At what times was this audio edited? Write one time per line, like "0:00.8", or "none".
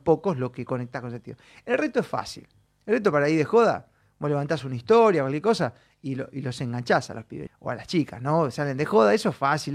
0:07.5